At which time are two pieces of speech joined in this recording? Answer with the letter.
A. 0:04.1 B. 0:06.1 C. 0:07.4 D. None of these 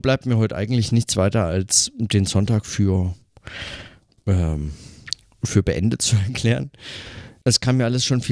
C